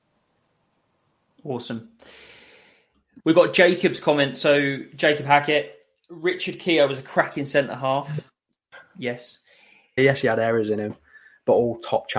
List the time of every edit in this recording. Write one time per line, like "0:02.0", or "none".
0:10.0

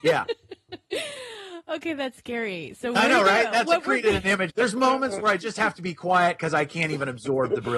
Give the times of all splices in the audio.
0:04.5

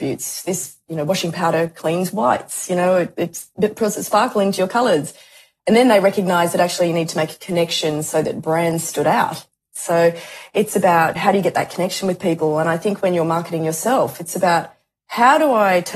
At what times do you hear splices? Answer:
0:11.2

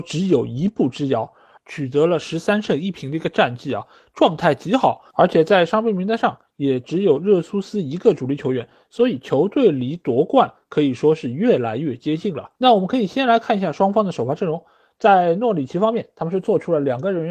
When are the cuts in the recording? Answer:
0:01.6
0:12.6

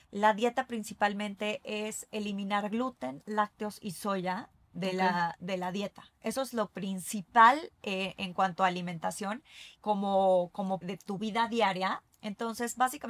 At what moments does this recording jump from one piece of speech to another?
0:09.8
0:10.8
0:12.1

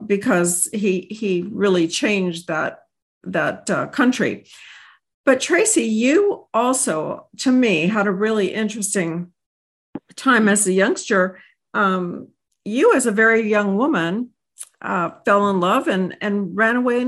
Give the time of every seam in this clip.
none

